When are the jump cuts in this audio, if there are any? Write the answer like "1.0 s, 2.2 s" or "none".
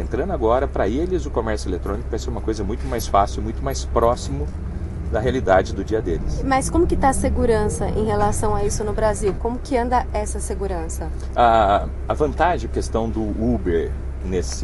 9.4 s, 12.7 s